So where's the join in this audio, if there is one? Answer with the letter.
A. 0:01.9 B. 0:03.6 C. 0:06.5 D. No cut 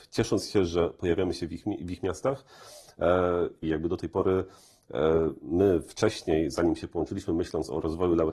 B